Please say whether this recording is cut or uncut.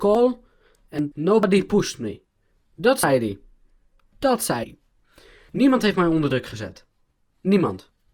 cut